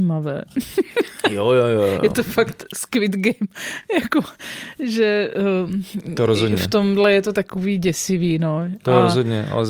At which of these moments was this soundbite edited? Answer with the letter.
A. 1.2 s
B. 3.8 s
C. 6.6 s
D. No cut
D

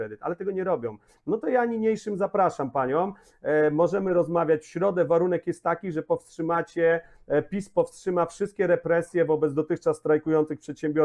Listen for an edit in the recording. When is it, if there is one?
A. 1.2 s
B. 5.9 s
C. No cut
A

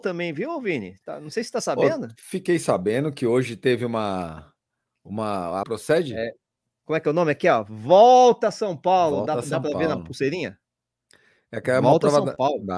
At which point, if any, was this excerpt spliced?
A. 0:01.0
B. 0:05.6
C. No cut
B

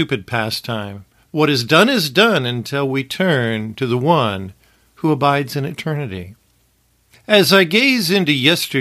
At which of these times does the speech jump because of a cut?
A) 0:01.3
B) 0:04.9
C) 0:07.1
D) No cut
A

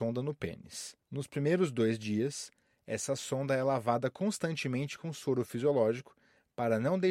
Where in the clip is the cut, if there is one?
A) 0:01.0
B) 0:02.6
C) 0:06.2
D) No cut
A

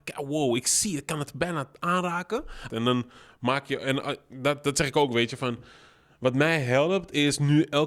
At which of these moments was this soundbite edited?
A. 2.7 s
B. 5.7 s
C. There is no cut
A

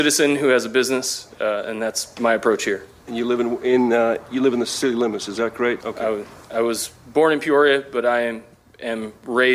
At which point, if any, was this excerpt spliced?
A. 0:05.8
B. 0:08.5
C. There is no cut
A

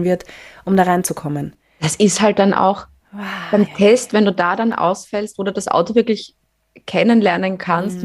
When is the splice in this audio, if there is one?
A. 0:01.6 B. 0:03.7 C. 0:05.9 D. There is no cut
B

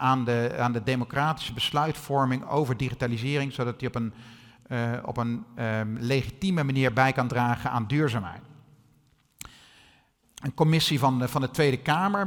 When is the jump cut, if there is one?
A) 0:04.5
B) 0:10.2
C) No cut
B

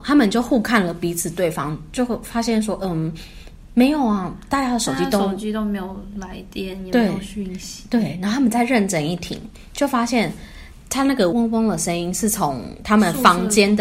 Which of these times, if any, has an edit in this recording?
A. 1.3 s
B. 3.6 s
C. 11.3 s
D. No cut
C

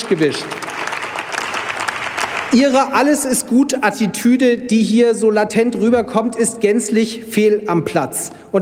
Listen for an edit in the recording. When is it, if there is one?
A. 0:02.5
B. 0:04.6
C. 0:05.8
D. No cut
D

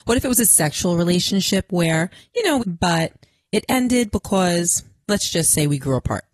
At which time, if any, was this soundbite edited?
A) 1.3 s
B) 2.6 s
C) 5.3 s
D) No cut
B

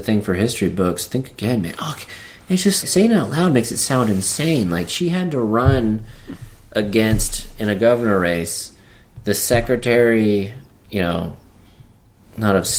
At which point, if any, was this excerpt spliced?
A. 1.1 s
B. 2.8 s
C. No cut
B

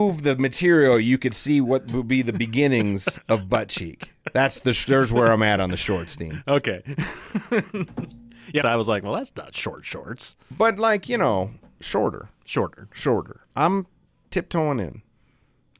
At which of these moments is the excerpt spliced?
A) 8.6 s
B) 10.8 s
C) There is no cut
A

